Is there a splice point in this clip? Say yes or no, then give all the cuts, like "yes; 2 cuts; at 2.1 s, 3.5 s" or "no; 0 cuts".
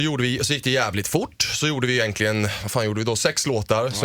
no; 0 cuts